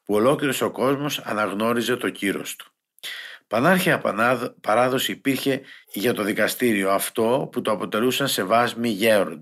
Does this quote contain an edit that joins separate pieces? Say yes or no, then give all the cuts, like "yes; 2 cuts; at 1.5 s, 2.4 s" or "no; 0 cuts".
yes; 1 cut; at 5.8 s